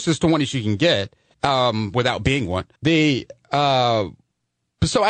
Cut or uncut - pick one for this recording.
cut